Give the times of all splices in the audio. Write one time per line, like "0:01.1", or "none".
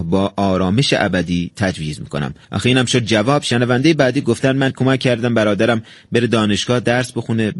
none